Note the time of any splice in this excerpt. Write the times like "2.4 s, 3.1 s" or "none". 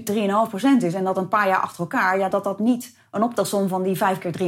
none